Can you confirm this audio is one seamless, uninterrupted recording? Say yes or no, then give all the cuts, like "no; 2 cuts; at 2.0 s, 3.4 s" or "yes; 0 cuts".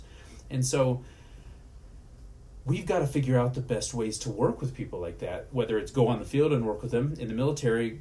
yes; 0 cuts